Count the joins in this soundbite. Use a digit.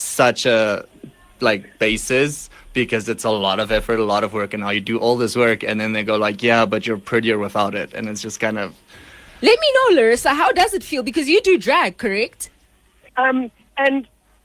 1